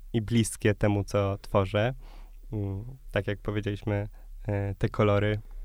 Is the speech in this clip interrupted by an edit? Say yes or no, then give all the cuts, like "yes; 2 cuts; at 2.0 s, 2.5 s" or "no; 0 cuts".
no; 0 cuts